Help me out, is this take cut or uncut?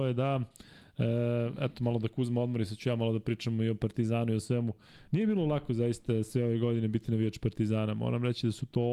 uncut